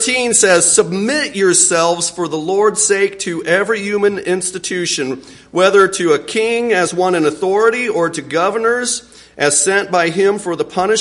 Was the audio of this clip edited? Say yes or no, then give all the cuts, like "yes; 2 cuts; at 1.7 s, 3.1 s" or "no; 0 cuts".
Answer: no; 0 cuts